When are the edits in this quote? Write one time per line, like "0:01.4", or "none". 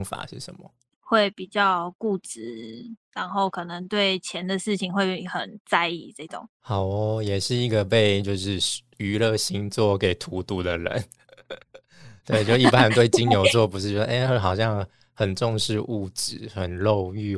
none